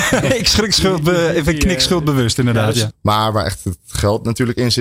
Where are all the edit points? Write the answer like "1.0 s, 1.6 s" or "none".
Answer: 2.9 s